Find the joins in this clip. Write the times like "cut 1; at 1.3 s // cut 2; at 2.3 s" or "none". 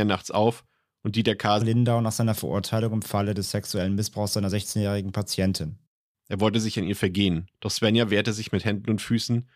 cut 1; at 1.6 s // cut 2; at 6.1 s // cut 3; at 7.5 s